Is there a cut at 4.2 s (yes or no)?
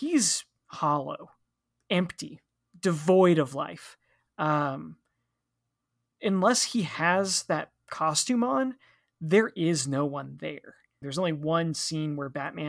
no